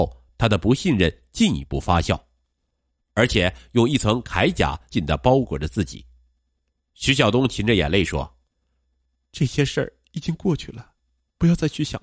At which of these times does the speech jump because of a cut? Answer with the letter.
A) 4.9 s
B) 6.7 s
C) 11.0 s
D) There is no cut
A